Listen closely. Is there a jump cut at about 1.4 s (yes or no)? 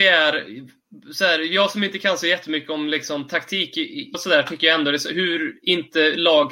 no